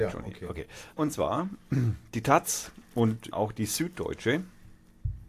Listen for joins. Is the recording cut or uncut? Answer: cut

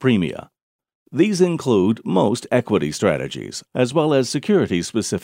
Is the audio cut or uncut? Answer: cut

